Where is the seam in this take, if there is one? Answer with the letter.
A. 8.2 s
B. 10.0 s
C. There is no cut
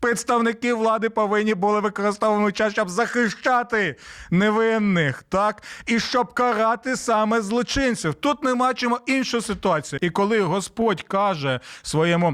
B